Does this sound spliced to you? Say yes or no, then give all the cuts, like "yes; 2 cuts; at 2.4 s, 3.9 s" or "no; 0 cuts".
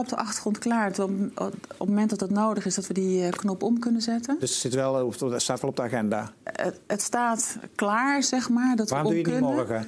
yes; 1 cut; at 6.4 s